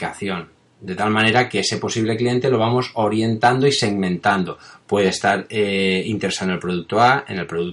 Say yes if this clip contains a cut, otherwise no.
no